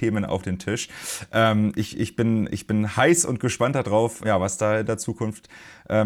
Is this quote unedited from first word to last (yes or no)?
no